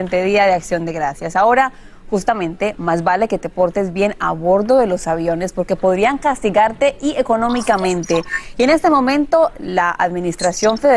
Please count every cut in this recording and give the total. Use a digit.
0